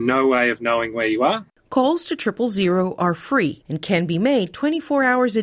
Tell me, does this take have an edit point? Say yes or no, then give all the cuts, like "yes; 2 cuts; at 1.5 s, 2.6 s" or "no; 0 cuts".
yes; 1 cut; at 1.5 s